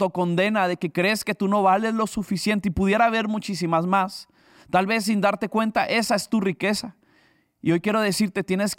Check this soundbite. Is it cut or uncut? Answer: uncut